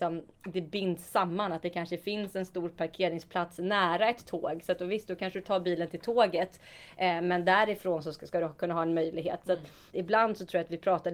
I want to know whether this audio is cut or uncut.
uncut